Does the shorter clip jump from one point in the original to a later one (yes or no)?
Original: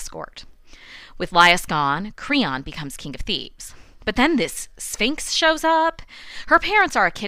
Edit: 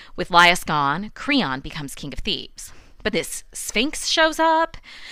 yes